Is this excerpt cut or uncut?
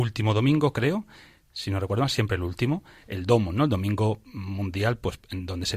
uncut